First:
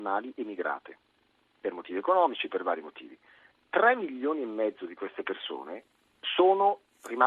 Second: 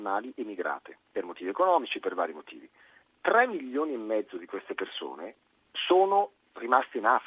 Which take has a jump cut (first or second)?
second